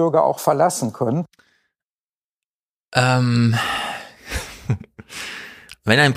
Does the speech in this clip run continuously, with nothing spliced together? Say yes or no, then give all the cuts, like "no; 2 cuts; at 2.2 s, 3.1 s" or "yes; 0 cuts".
yes; 0 cuts